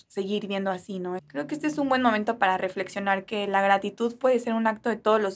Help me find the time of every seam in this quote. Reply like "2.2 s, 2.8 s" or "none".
1.2 s